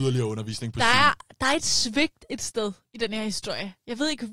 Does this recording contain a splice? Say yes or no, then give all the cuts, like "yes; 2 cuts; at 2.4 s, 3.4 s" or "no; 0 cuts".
no; 0 cuts